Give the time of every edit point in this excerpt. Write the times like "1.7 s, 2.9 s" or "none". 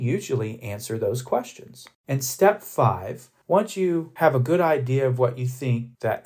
2.0 s